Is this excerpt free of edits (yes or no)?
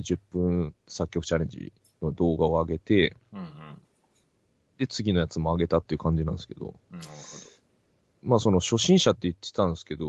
no